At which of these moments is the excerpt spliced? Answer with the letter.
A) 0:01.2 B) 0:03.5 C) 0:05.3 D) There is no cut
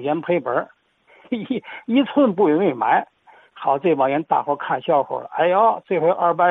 A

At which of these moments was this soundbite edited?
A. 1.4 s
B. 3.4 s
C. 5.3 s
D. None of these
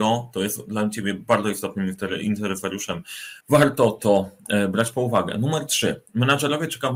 B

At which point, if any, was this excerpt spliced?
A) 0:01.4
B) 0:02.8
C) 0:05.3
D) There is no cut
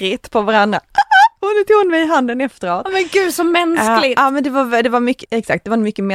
C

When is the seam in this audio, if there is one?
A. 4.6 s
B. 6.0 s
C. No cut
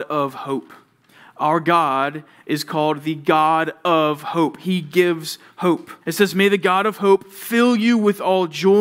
B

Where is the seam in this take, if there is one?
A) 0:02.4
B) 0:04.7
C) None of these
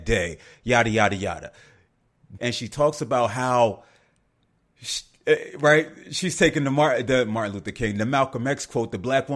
A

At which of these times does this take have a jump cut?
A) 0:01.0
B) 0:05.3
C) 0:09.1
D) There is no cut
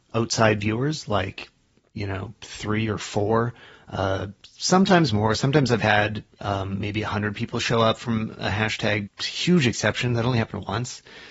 C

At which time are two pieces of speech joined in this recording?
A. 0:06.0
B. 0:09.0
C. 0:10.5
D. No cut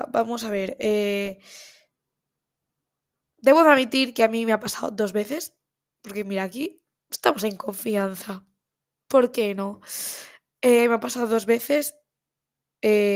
A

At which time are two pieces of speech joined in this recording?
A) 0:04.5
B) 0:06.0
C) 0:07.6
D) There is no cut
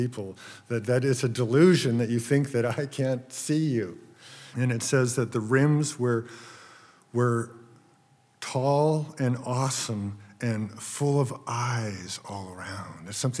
A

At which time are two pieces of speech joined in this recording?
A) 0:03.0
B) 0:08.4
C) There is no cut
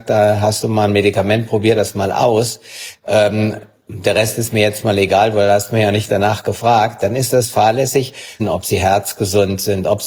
B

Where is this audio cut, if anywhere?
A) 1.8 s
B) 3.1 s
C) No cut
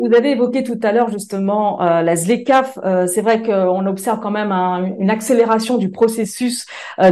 C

